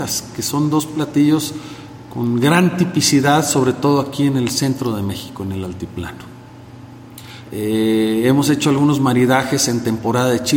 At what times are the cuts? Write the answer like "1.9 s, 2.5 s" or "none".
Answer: 7.4 s